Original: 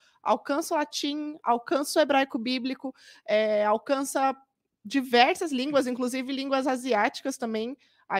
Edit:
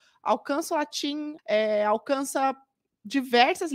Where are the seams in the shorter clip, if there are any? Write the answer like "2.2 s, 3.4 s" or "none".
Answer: 1.4 s